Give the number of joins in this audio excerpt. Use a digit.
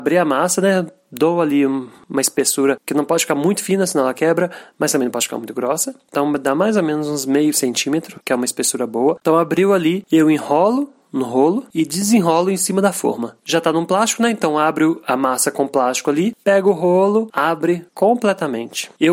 1